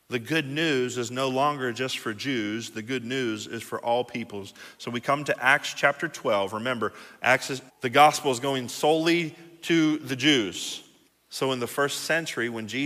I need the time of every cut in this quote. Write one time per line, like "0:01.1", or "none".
0:07.7
0:11.1